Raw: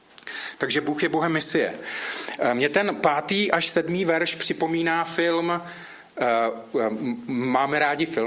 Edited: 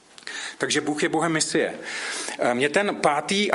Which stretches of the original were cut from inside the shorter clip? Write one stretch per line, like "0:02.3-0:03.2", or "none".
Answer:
none